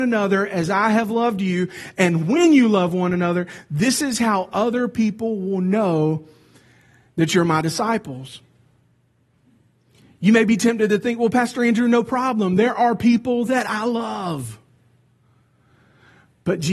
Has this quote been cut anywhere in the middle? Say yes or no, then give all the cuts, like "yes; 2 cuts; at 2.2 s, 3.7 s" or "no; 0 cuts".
no; 0 cuts